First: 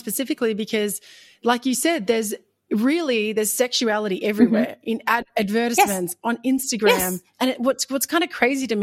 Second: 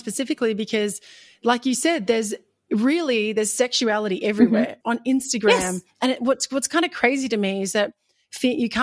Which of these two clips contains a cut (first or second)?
second